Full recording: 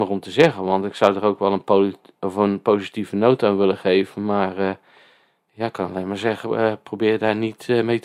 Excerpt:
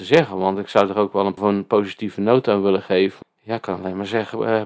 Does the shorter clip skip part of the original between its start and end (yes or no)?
yes